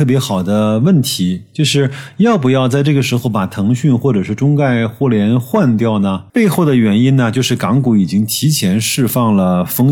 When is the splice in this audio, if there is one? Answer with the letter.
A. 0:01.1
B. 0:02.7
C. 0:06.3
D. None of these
C